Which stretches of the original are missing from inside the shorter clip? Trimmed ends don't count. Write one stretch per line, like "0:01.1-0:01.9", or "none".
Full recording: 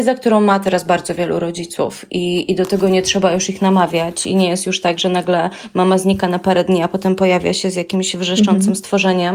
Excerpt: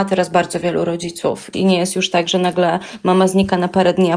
0:02.1-0:04.2